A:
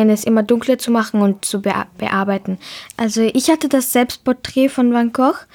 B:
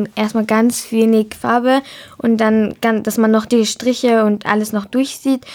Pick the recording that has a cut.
A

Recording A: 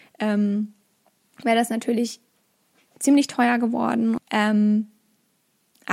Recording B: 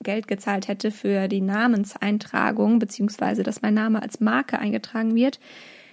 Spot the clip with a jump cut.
A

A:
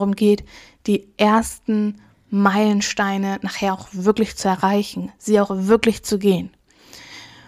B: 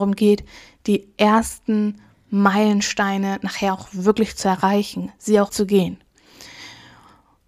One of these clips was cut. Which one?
B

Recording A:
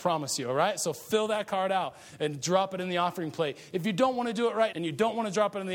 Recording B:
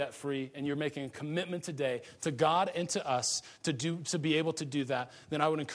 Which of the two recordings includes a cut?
A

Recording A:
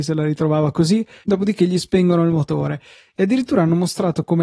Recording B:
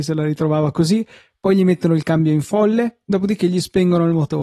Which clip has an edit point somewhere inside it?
A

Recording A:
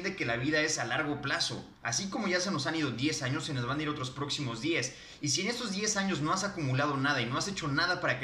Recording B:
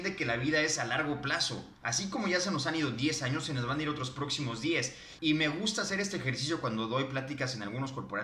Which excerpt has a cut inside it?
B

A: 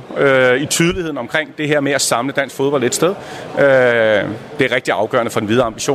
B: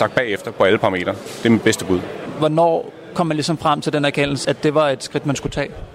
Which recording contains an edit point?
B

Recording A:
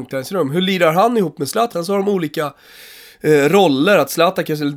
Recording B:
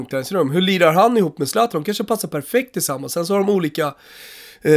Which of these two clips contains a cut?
A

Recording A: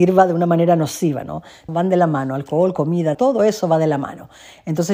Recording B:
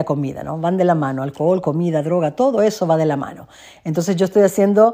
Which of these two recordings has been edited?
A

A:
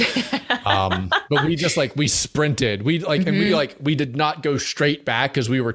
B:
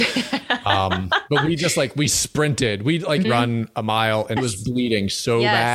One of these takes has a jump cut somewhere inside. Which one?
B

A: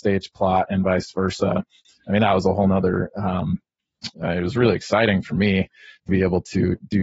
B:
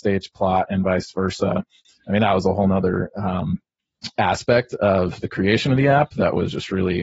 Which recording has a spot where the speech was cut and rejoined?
A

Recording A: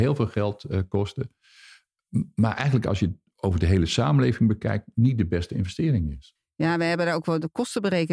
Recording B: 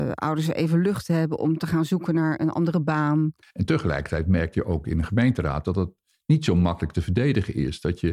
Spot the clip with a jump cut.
B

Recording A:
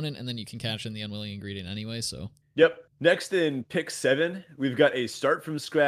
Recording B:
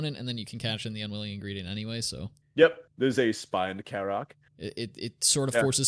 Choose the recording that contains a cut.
B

